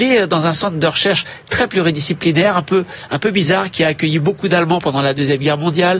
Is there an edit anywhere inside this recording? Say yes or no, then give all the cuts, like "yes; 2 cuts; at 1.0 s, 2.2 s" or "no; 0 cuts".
no; 0 cuts